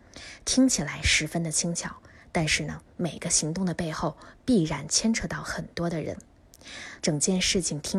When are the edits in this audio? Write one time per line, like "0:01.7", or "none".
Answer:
0:07.0